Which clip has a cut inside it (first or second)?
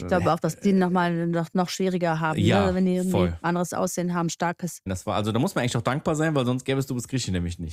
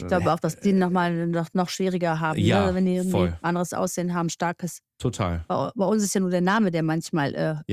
first